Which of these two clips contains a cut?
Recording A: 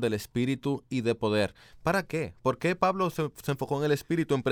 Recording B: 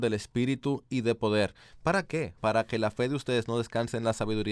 B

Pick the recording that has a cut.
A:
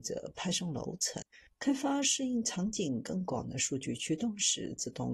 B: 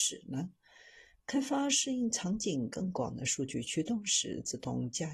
A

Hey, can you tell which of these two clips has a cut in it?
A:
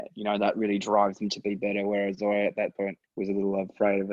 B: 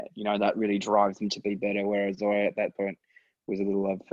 A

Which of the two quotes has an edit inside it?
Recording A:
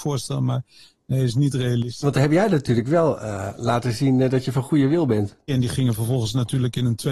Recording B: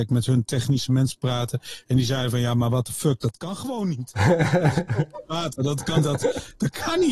A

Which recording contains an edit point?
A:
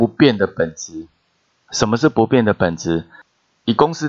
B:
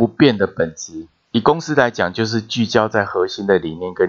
B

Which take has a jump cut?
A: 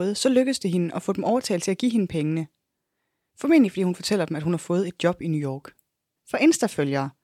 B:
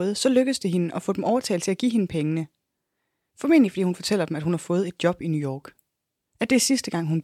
A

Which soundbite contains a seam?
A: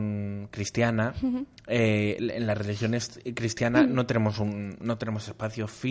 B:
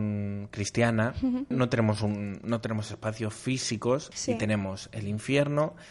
B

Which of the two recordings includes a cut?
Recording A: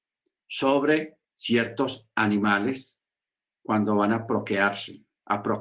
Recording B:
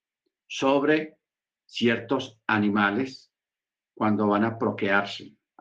A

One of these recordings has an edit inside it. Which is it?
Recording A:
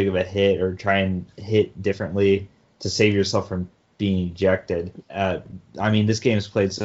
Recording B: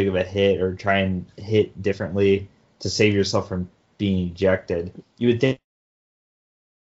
A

